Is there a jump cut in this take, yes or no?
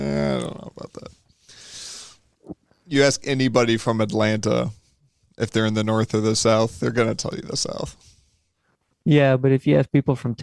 no